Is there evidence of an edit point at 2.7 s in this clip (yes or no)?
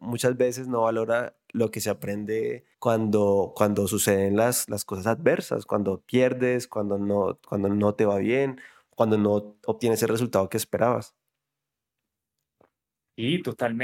yes